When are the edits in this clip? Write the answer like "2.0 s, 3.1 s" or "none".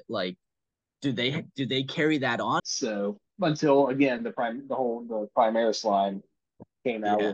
2.6 s